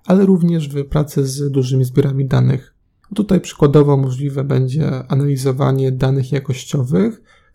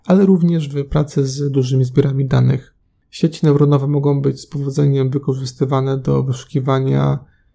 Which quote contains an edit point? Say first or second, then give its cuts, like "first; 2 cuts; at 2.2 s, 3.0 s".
first; 1 cut; at 3.0 s